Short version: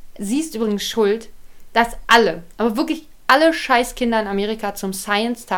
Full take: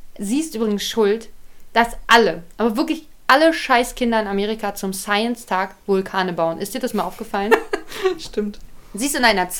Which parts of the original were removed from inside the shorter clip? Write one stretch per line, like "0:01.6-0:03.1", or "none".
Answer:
none